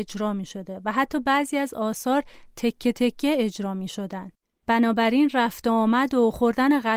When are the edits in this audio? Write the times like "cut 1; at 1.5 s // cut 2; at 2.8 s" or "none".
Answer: none